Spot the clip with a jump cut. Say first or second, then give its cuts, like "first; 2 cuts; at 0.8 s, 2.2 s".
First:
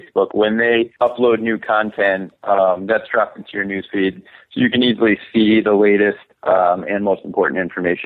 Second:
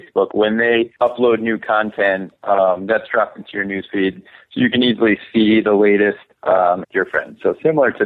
second; 1 cut; at 6.8 s